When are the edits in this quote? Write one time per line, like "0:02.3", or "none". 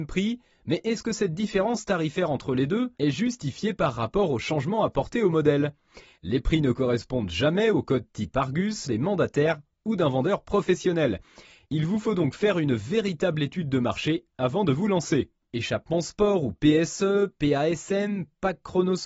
0:08.9
0:15.5